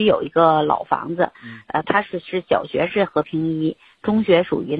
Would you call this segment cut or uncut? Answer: uncut